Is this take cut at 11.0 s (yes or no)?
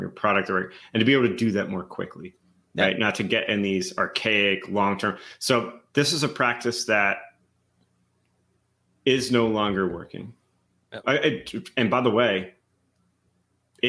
yes